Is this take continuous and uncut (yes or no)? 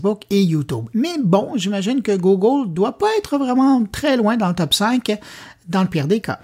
yes